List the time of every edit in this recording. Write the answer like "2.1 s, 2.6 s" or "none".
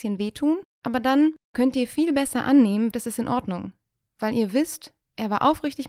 2.9 s